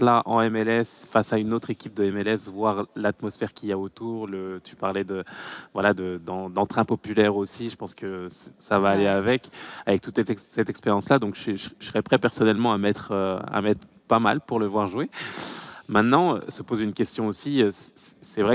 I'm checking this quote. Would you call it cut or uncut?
uncut